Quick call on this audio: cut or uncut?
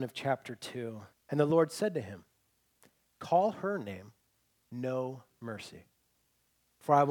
cut